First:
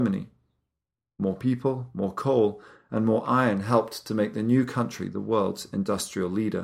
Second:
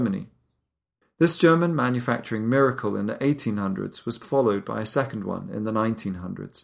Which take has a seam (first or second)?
second